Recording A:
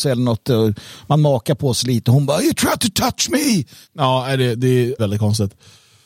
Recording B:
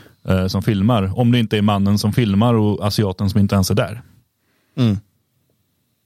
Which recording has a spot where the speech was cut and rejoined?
A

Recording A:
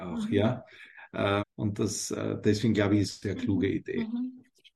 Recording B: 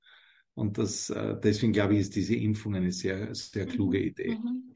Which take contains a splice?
A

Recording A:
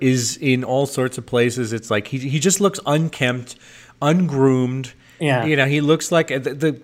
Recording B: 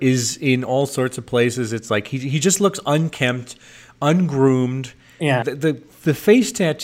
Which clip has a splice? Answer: B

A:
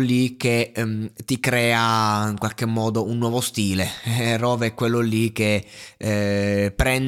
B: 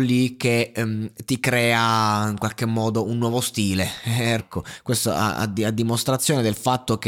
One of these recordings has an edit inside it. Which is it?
B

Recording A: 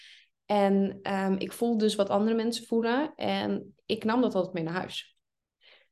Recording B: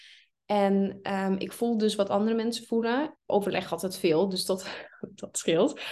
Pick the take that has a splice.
B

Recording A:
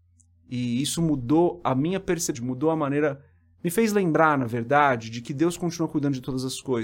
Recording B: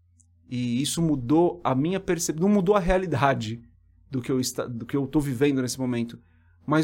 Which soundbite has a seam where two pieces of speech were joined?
A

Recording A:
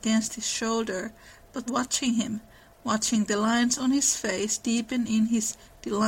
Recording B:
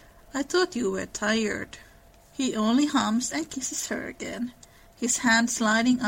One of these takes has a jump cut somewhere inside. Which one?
A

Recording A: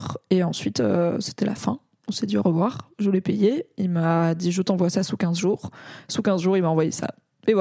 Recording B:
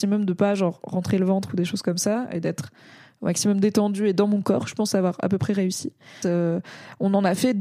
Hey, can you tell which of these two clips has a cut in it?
B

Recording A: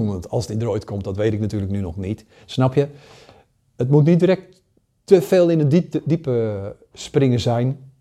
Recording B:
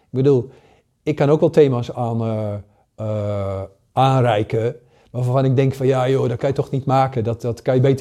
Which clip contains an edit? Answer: B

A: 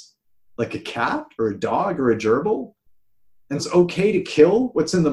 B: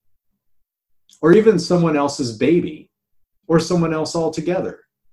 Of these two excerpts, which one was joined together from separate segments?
A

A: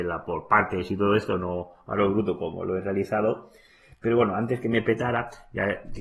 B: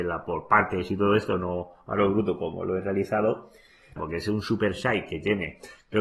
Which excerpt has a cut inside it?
B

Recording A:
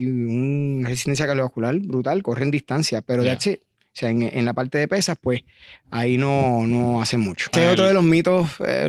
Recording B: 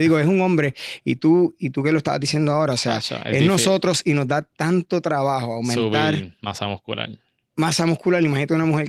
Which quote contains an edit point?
A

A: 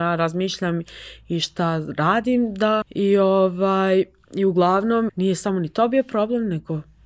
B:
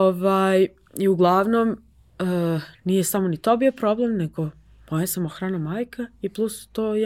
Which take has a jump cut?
A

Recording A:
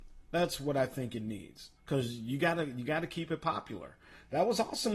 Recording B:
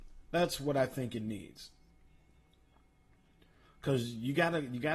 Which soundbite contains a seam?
A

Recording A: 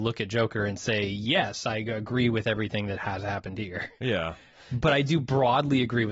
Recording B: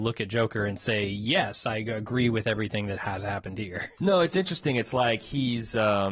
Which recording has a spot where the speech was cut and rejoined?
B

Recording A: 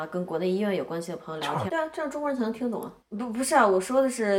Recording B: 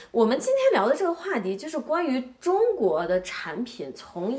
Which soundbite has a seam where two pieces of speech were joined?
A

